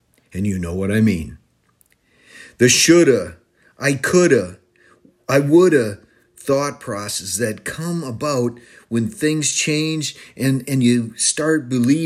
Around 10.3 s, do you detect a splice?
no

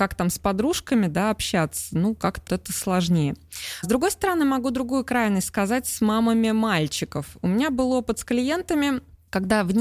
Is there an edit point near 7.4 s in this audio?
no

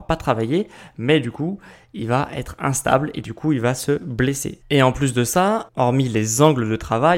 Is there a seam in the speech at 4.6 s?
yes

